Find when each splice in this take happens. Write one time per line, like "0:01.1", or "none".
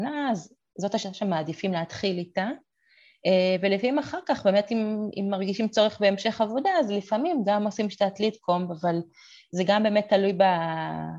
none